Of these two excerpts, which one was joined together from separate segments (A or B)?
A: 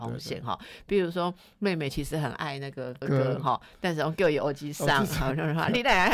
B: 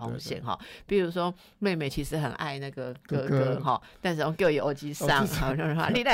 A